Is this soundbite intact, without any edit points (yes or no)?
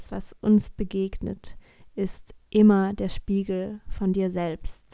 yes